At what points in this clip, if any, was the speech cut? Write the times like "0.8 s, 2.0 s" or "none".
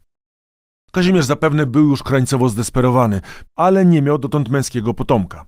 3.4 s